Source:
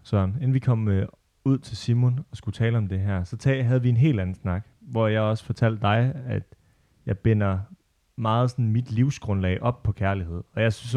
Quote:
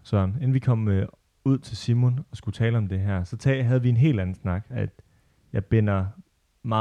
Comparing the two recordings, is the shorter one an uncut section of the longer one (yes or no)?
no